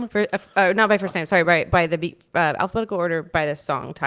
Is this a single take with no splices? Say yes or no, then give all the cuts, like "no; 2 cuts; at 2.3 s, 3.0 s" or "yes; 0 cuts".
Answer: yes; 0 cuts